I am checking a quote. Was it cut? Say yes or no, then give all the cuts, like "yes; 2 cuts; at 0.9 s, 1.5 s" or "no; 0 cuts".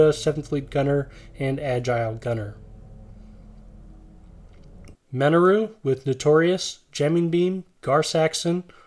yes; 1 cut; at 4.9 s